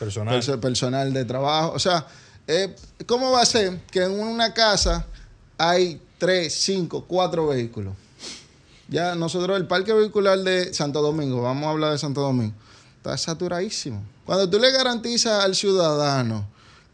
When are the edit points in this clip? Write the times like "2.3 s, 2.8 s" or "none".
10.7 s, 14.2 s